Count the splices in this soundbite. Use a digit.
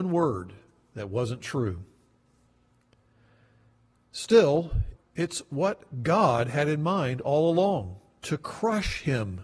1